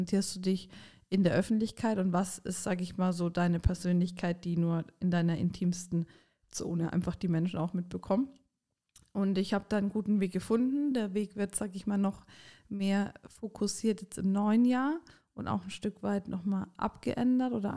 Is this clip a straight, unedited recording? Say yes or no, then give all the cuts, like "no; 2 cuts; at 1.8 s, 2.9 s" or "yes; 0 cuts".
yes; 0 cuts